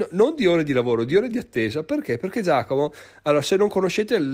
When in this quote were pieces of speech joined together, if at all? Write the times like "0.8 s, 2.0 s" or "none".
none

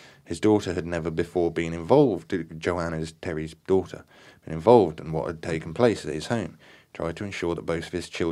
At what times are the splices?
none

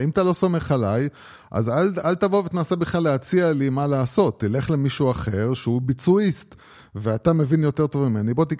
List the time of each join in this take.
none

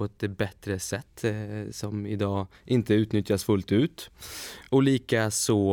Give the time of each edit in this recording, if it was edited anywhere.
none

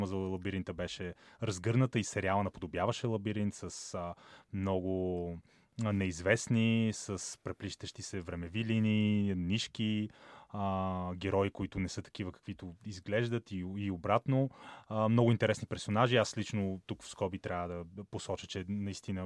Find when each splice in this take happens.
none

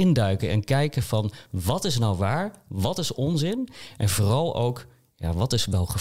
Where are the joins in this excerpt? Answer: none

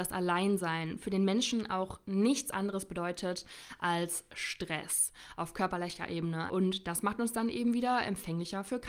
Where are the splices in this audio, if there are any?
6.5 s

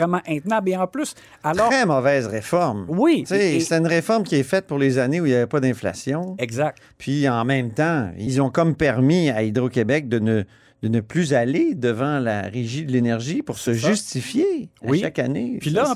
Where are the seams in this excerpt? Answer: none

